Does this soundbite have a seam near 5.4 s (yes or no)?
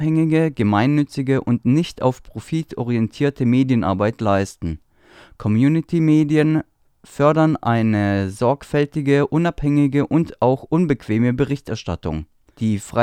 no